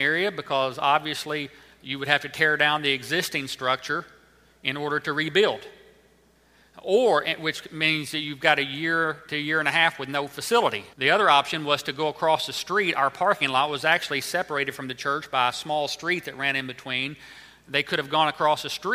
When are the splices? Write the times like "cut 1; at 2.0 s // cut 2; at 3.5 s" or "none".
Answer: cut 1; at 10.9 s